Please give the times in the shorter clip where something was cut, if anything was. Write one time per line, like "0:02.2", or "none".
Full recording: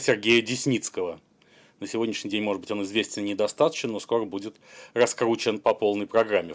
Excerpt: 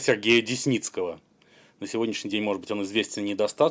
none